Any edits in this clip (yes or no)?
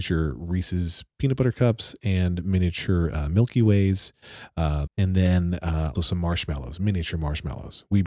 yes